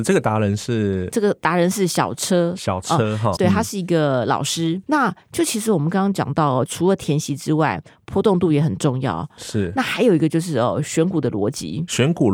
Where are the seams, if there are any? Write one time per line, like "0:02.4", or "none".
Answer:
0:03.4
0:04.8
0:06.7

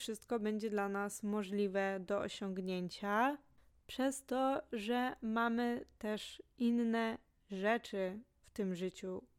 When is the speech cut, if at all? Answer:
none

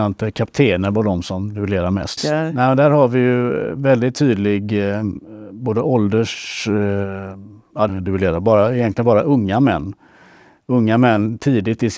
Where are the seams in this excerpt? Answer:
0:02.2
0:07.9

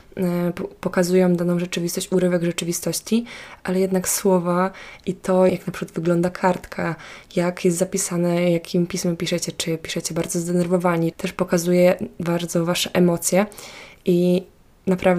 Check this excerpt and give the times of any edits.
0:05.5
0:11.1

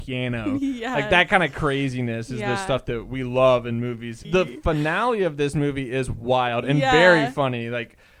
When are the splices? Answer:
0:04.2

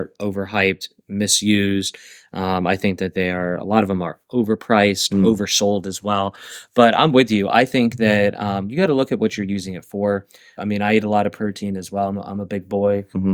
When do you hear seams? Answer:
0:10.6

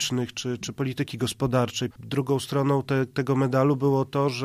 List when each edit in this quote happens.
0:01.9

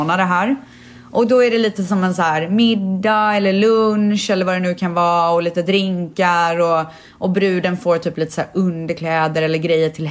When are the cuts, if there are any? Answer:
none

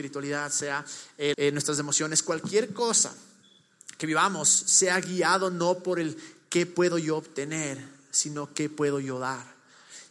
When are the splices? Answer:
0:01.3

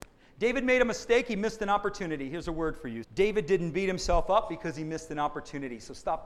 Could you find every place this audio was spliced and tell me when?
0:03.0

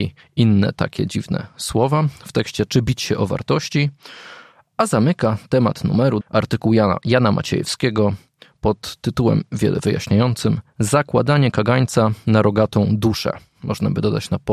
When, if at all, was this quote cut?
0:06.2

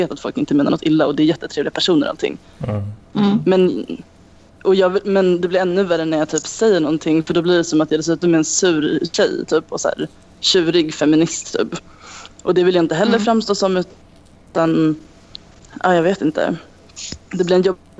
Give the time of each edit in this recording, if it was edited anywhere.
none

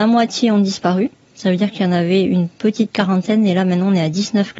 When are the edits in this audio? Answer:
none

